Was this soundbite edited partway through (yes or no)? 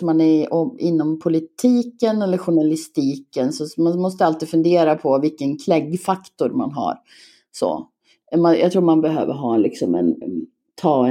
yes